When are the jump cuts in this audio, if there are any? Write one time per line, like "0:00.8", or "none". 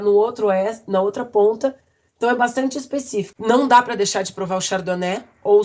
0:03.3